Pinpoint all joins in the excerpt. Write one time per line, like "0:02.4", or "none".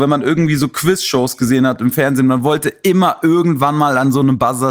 none